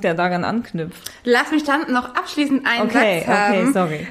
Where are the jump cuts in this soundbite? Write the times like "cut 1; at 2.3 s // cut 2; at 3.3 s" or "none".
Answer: none